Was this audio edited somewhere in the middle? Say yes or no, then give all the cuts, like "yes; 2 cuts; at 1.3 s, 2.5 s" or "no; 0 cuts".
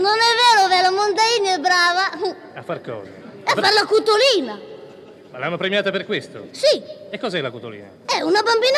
no; 0 cuts